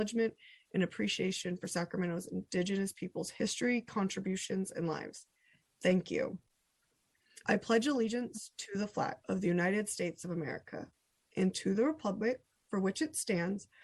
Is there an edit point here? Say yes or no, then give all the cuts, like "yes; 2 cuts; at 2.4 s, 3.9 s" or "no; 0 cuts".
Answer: yes; 2 cuts; at 7.4 s, 9.2 s